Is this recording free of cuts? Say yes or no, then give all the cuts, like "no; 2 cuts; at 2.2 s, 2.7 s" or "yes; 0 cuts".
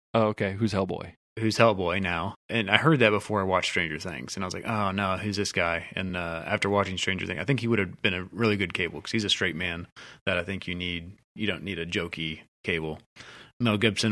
no; 1 cut; at 6.1 s